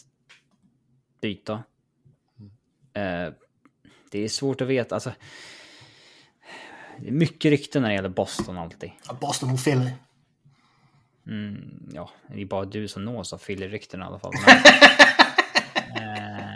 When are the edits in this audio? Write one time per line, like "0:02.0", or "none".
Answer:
0:09.0